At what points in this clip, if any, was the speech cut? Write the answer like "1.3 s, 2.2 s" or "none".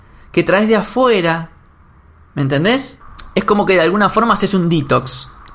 none